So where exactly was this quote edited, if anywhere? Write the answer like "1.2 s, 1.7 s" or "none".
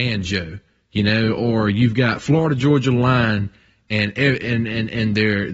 none